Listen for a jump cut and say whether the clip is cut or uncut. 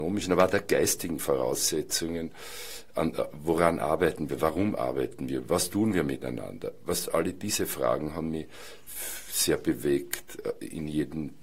uncut